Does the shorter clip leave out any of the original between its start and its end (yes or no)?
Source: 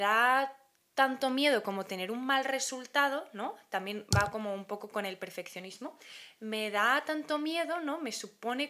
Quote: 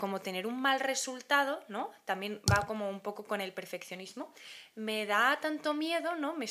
no